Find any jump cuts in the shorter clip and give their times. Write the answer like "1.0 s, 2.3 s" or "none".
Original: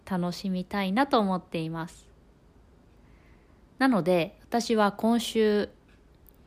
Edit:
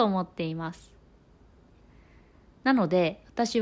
none